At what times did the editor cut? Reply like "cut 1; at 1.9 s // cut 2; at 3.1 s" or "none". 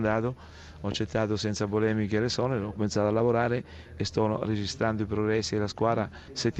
cut 1; at 2.7 s